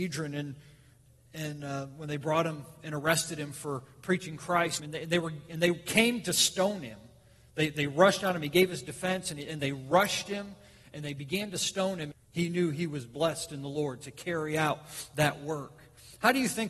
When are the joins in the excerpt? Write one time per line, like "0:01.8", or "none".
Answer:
0:04.8
0:12.1